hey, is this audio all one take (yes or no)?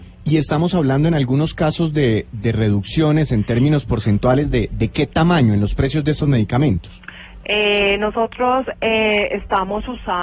yes